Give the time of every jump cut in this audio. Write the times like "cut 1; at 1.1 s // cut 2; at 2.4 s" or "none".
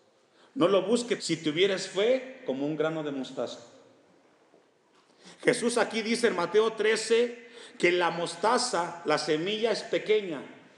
cut 1; at 1.2 s